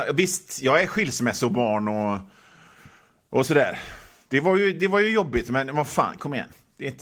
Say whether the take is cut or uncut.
uncut